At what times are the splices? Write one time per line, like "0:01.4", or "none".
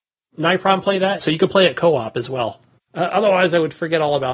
0:01.2
0:02.8